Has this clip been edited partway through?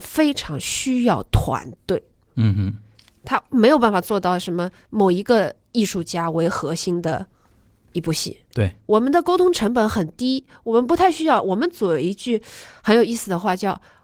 yes; 1 cut; at 8.5 s

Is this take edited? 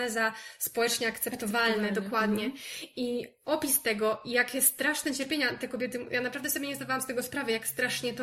no; 0 cuts

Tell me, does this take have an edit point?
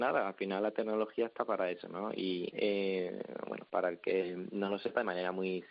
yes; 1 cut; at 2.5 s

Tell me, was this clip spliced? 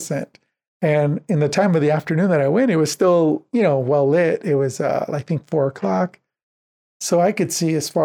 no; 0 cuts

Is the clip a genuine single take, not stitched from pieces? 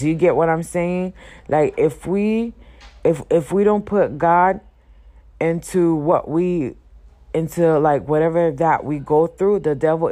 yes; 0 cuts

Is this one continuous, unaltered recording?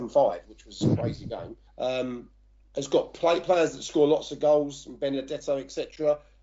no; 1 cut; at 1.7 s

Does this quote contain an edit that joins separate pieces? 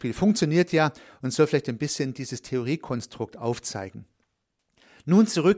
no; 0 cuts

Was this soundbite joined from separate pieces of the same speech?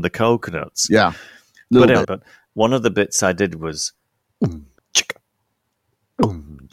yes; 2 cuts; at 2.0 s, 4.8 s

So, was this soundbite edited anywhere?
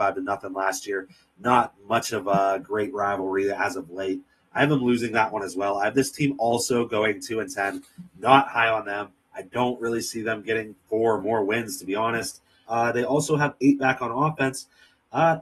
yes; 2 cuts; at 10.8 s, 12.7 s

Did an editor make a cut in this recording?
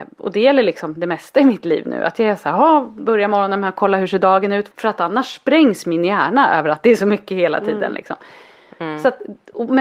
yes; 1 cut; at 4.7 s

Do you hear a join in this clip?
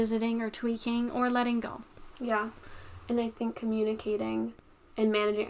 no; 0 cuts

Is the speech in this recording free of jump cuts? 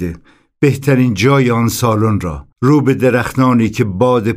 no; 1 cut; at 2.5 s

